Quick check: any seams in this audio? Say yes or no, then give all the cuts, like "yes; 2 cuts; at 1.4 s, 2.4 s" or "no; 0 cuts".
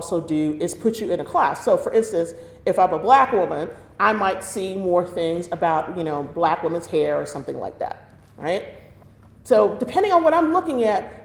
no; 0 cuts